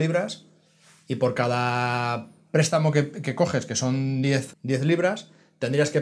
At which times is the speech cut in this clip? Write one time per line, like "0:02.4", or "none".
0:04.5